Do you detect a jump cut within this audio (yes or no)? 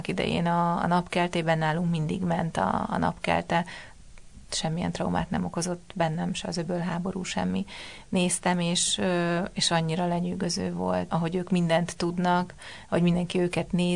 yes